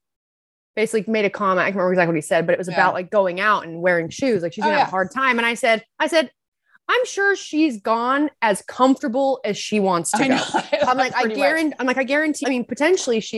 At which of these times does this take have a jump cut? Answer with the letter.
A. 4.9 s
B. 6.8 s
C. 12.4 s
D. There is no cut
C